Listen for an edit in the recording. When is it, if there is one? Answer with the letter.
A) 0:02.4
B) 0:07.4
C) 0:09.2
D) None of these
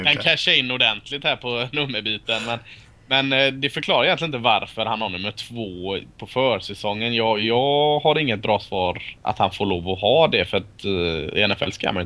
C